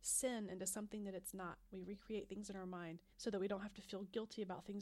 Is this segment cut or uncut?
cut